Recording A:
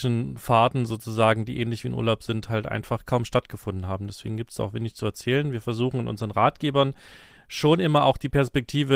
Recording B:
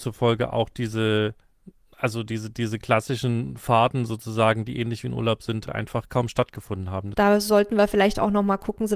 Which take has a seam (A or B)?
B